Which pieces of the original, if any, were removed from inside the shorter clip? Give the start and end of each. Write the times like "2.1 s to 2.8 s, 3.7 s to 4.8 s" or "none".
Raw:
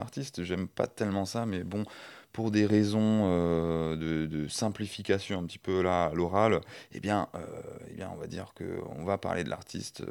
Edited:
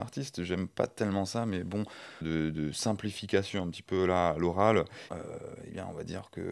2.2 s to 4.0 s, 6.8 s to 7.3 s